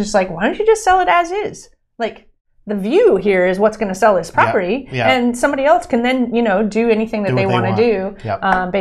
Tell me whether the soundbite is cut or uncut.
uncut